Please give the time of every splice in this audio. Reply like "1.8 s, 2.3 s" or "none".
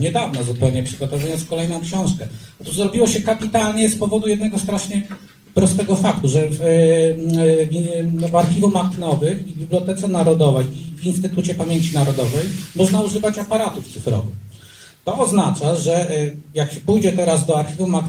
none

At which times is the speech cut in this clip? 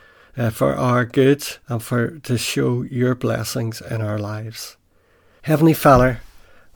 1.6 s, 5.4 s

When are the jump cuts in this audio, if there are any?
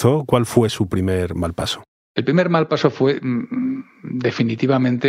none

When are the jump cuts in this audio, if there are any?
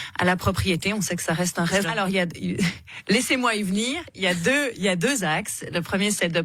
1.8 s

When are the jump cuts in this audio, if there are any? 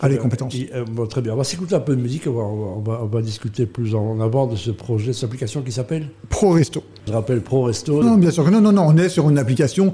8.0 s

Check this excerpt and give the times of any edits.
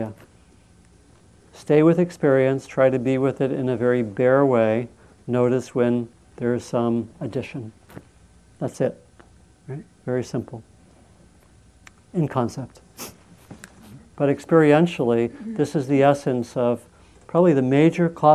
14.0 s

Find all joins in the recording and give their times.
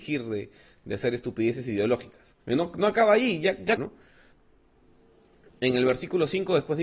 2.4 s, 3.8 s

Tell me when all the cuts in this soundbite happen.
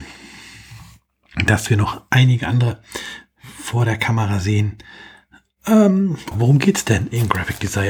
6.3 s

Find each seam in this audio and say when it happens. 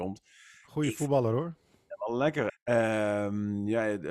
2.5 s

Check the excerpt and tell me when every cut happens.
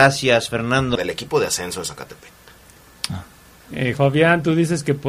1.0 s, 4.0 s

